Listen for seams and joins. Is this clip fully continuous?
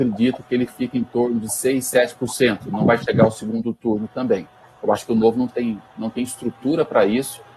yes; 0 cuts

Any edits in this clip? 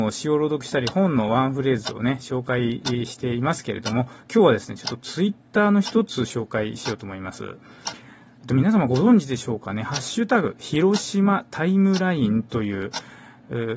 no; 0 cuts

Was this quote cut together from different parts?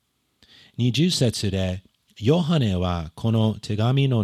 no; 0 cuts

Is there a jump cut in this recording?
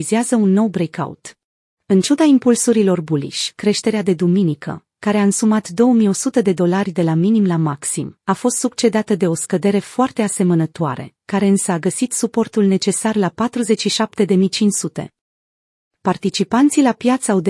yes; 1 cut; at 1.8 s

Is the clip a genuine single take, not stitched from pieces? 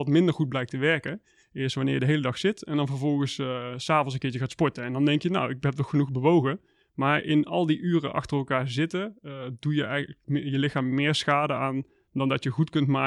yes; 0 cuts

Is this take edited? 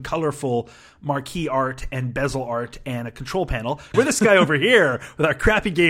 yes; 1 cut; at 3.9 s

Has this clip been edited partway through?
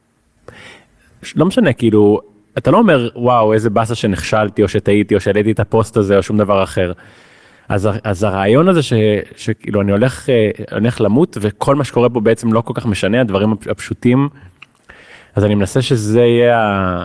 no; 0 cuts

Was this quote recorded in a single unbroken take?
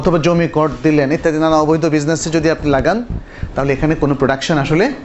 no; 1 cut; at 1.2 s

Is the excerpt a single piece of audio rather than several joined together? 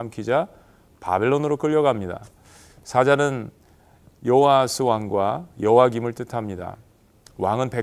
yes; 0 cuts

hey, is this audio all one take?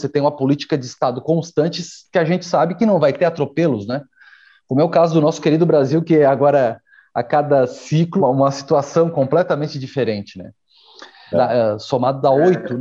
no; 2 cuts; at 8.2 s, 11.3 s

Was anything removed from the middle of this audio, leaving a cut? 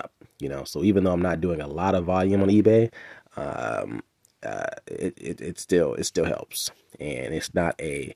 no; 0 cuts

